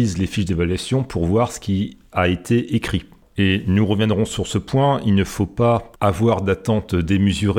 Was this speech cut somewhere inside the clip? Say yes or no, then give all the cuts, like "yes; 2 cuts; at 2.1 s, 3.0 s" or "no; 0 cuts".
yes; 1 cut; at 6.0 s